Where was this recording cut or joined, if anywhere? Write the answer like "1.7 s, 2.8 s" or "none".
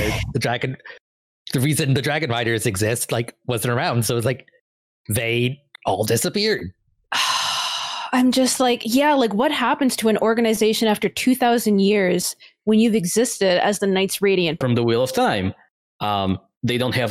14.6 s

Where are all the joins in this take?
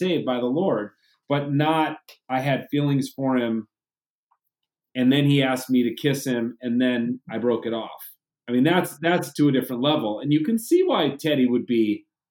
none

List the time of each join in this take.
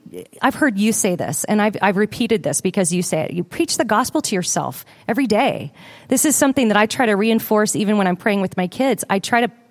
none

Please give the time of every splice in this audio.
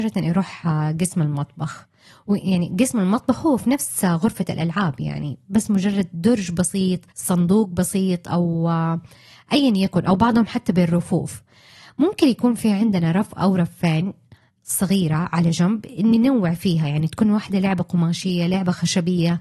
7.1 s

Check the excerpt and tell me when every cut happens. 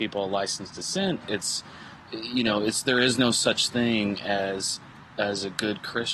1.2 s

